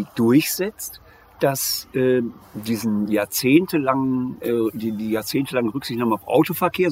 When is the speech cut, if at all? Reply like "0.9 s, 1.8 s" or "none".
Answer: 2.4 s